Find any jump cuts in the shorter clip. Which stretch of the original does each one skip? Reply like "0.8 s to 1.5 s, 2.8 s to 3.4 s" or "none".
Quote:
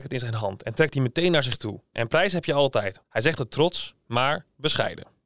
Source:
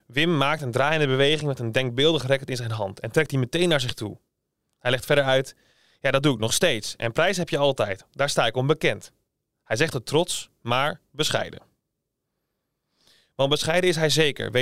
4.3 s to 7.0 s, 8.1 s to 9.6 s